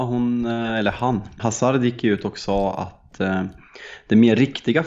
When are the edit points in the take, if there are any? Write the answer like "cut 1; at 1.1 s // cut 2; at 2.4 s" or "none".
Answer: cut 1; at 1.4 s